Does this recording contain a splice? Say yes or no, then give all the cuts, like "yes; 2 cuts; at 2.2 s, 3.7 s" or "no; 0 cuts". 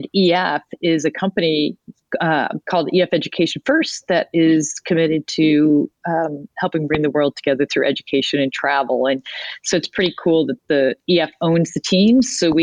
no; 0 cuts